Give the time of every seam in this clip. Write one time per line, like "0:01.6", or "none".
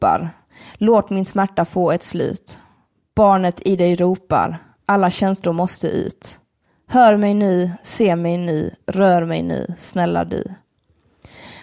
none